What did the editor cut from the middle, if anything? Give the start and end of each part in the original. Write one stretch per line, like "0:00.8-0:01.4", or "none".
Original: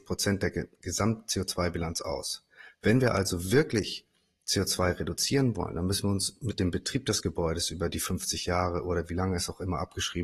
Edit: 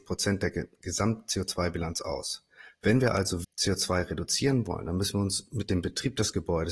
0:03.4-0:04.3